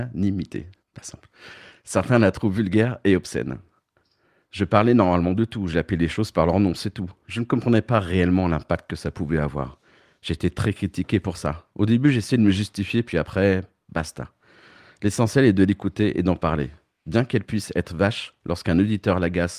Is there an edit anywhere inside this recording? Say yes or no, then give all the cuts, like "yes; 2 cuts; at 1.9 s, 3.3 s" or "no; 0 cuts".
no; 0 cuts